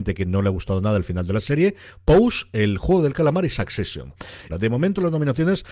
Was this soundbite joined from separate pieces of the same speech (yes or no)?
yes